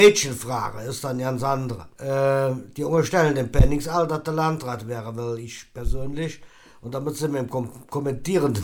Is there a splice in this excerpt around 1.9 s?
yes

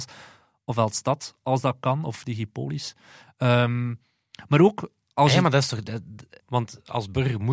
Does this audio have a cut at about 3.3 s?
no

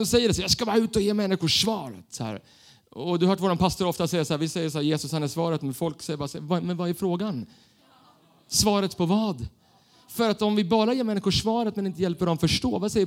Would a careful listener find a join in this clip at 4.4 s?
no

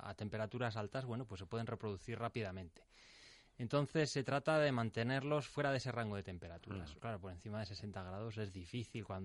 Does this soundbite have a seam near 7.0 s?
yes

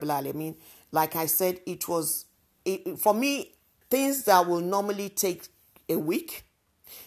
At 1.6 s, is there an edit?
no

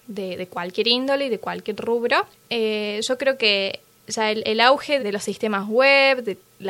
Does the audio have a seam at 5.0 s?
yes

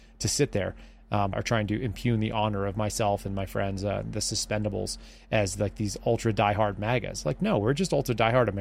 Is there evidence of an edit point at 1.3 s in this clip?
yes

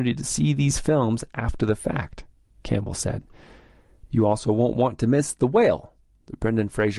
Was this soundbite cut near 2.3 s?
no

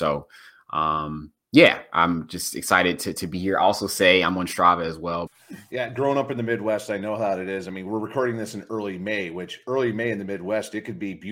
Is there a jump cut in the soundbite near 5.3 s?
yes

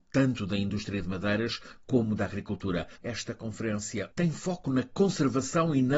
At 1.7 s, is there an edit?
no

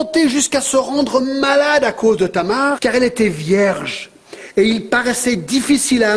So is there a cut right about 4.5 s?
no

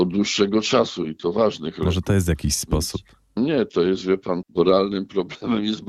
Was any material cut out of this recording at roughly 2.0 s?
no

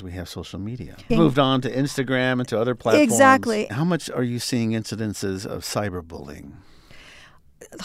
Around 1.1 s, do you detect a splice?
yes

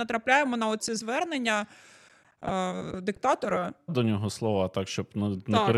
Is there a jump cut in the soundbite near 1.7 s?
no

